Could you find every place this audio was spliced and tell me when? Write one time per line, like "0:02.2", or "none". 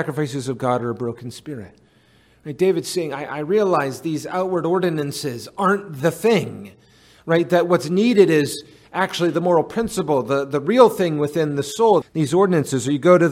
0:12.0